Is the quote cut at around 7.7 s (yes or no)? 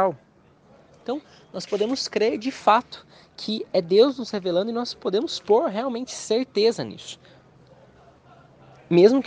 no